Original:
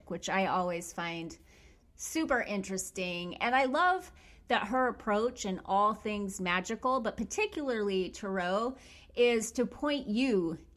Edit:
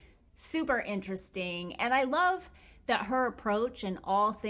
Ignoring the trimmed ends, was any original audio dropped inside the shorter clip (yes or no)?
no